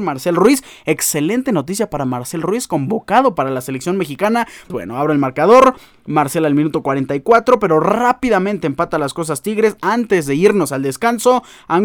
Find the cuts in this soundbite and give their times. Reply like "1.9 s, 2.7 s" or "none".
4.7 s